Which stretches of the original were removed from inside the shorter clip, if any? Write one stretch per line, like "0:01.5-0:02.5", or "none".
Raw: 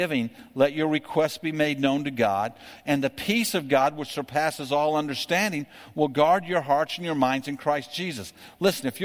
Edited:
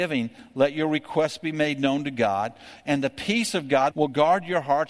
0:03.9-0:05.9